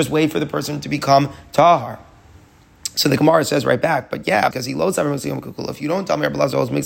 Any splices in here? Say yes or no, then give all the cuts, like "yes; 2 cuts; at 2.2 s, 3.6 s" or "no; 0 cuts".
yes; 1 cut; at 4.5 s